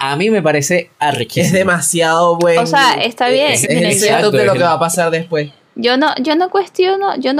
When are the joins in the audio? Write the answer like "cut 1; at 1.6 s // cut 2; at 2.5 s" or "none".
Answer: cut 1; at 3.6 s